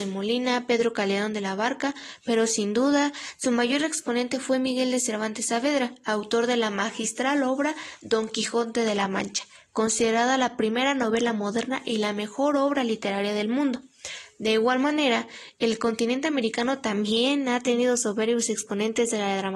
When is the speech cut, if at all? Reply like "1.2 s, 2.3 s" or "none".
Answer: none

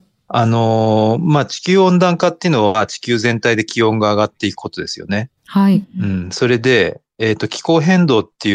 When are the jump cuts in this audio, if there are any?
5.4 s

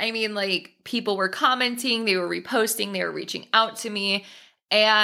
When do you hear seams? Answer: none

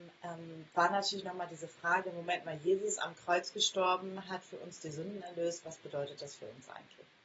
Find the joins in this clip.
none

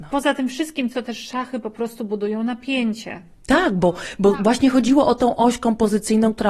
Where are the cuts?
0.9 s

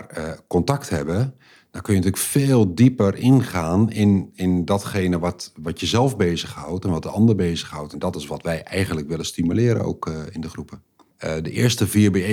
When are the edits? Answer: 7.9 s, 11.1 s

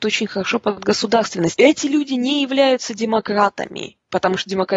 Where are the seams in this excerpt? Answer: 1.5 s

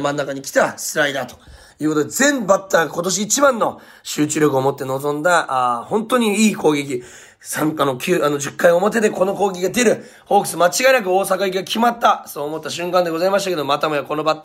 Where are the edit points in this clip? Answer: none

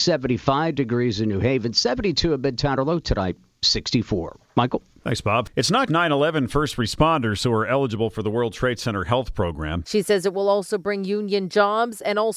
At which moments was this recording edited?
5.9 s, 9.8 s

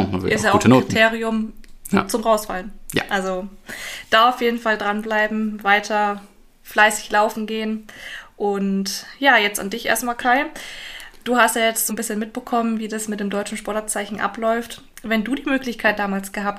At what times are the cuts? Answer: 11.9 s

